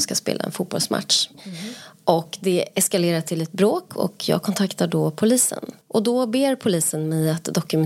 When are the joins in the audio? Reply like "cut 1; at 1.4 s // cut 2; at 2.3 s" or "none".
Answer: cut 1; at 1.3 s // cut 2; at 5.8 s